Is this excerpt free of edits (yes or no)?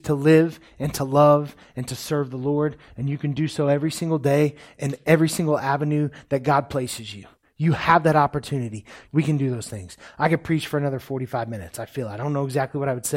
no